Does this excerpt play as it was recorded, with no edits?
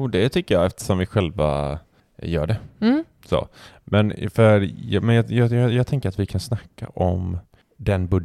yes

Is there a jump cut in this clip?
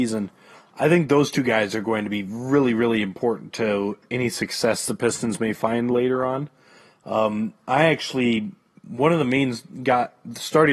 no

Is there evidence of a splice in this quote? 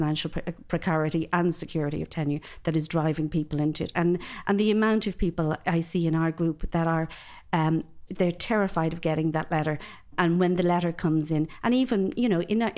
yes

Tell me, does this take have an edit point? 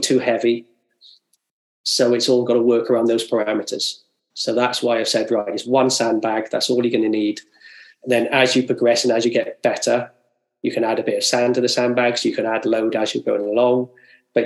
no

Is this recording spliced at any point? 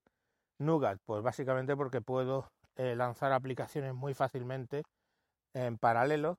no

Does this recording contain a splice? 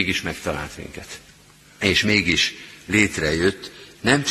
yes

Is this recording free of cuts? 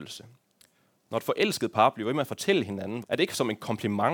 no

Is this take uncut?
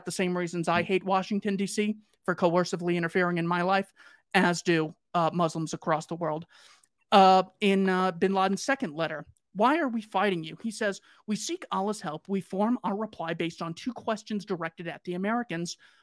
yes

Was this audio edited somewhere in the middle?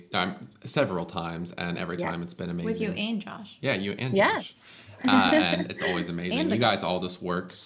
no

